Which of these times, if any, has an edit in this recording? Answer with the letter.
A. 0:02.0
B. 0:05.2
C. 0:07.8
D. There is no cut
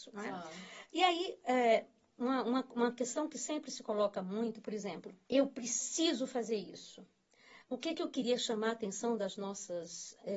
B